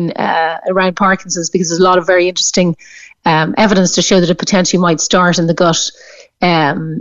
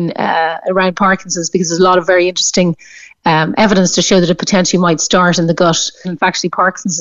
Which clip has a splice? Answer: second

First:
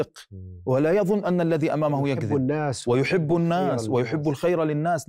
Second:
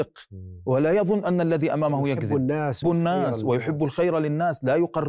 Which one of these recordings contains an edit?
second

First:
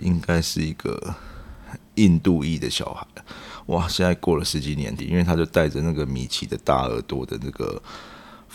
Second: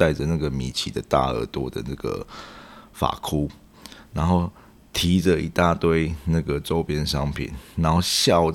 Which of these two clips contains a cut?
first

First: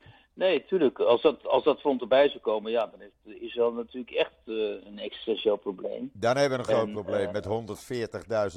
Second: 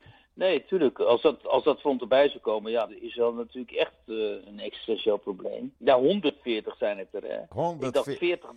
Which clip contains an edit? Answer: second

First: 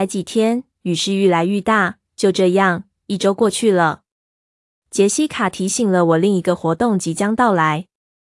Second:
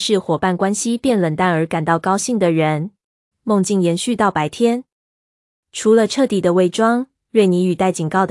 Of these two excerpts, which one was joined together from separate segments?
second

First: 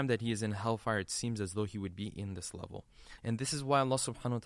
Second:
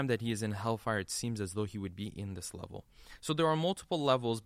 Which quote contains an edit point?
first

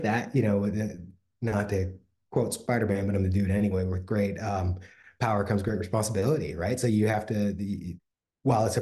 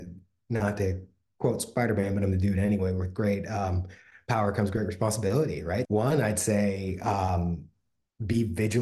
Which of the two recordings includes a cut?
second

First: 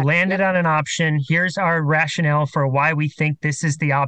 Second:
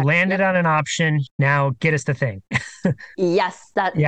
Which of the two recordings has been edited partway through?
second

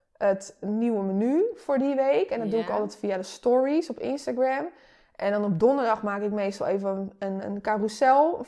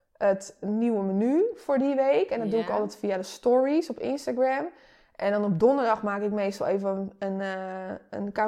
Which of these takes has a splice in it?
first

